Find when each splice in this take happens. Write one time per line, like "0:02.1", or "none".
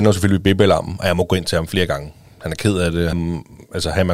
0:03.1